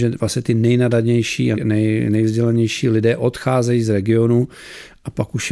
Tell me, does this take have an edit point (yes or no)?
yes